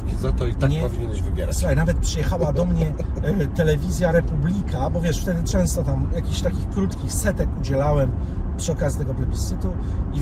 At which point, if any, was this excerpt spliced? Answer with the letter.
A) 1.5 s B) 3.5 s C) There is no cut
C